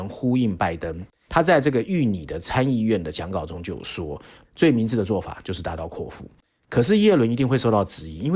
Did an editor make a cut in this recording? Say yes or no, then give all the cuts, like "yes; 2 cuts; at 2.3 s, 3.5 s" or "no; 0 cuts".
yes; 2 cuts; at 1.3 s, 4.4 s